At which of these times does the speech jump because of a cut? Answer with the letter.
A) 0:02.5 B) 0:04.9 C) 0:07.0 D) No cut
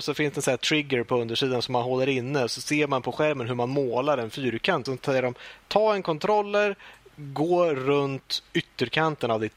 B